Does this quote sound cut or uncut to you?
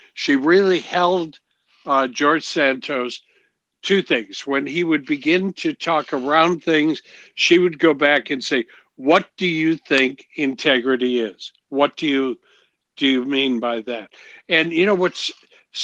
uncut